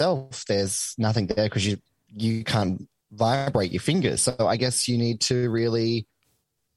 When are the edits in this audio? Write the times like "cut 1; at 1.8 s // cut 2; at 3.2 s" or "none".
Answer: cut 1; at 4.2 s